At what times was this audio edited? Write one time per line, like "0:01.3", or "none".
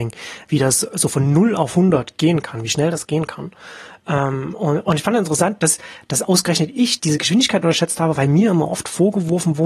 0:07.0